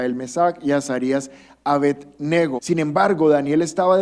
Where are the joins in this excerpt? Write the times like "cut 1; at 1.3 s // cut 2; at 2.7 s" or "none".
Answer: cut 1; at 2.6 s